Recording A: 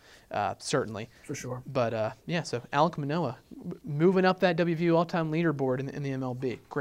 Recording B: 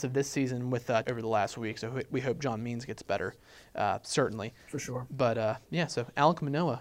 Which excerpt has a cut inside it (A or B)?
B